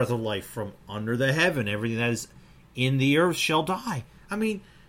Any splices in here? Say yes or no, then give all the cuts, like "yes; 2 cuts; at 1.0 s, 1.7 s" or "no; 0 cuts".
no; 0 cuts